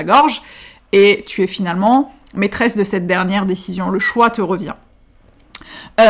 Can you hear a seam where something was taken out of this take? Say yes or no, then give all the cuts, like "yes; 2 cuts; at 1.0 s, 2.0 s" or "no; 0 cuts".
no; 0 cuts